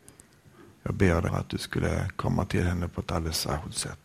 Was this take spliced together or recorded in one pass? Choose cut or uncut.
cut